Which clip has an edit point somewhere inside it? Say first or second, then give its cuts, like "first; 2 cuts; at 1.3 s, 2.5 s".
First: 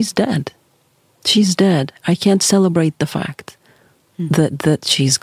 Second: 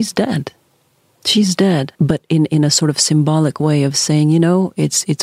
second; 1 cut; at 1.9 s